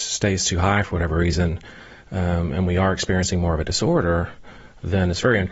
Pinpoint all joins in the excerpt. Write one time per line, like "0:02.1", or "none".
none